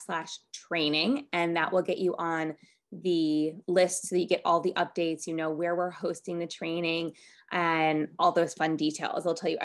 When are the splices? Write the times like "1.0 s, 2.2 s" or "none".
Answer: 3.6 s